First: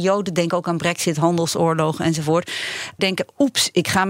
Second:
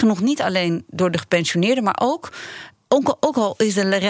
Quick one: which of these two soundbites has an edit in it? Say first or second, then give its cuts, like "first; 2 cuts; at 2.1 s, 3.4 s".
first; 1 cut; at 3.0 s